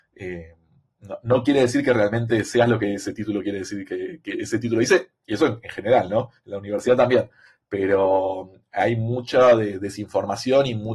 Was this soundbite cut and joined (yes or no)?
no